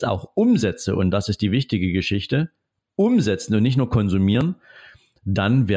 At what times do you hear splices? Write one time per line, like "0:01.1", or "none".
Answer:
none